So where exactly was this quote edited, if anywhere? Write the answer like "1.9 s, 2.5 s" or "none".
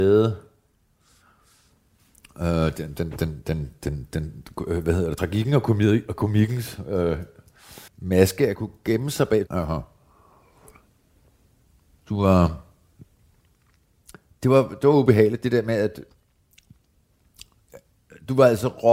7.9 s, 9.5 s